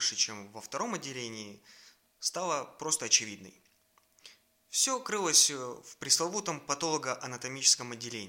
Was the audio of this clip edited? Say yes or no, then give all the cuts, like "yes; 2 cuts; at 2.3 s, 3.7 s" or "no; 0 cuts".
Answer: no; 0 cuts